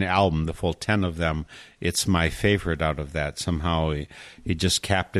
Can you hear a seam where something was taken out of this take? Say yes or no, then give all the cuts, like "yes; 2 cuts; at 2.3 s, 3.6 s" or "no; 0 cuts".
no; 0 cuts